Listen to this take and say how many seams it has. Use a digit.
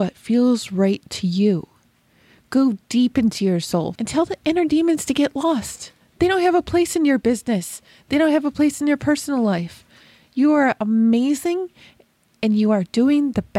1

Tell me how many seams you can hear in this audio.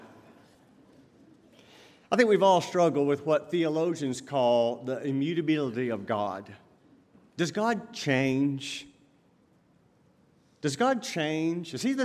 0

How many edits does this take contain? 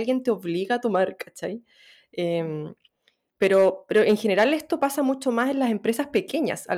0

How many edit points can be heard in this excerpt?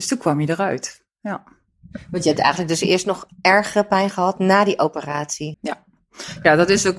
1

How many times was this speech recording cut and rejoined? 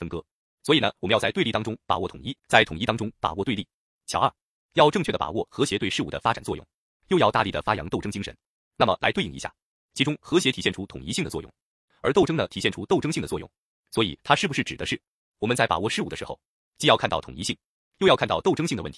1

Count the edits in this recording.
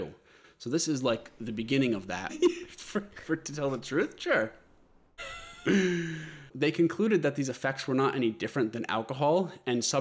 2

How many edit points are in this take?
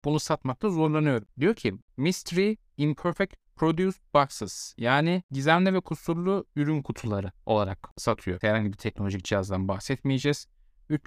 2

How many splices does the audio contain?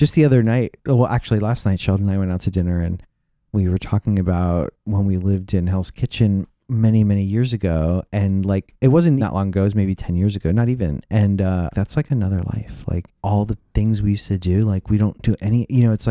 3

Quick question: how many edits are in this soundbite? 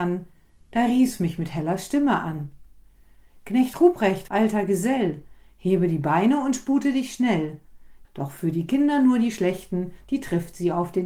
2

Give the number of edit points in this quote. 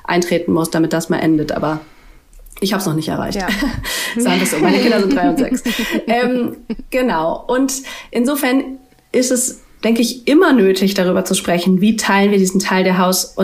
0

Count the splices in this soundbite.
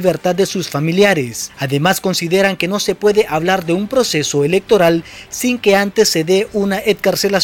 0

